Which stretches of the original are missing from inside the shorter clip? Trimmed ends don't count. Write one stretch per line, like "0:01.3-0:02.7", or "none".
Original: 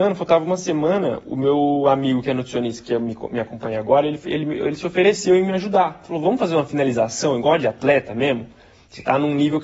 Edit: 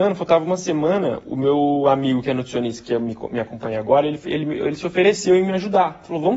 none